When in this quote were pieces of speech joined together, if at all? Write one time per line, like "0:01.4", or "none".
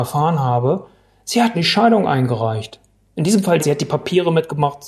0:01.5
0:03.6